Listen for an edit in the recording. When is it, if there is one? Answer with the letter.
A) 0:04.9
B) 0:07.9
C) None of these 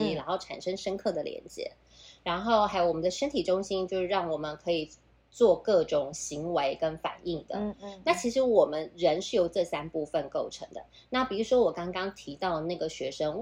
C